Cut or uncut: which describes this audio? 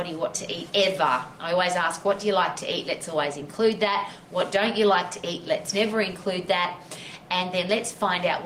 uncut